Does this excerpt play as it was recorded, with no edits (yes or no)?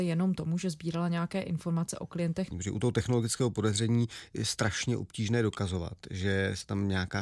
no